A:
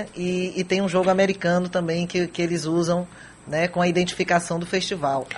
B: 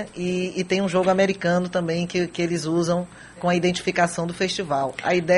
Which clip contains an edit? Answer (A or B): B